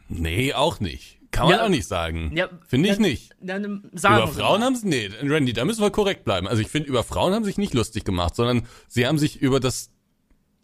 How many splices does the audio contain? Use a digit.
0